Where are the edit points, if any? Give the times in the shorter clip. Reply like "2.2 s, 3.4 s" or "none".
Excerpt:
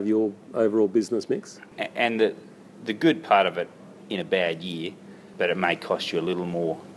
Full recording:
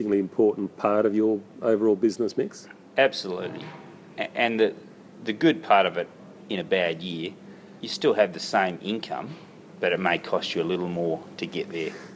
1.7 s, 5.3 s